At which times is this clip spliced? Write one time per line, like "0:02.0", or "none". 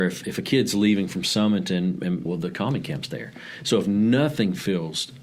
0:02.3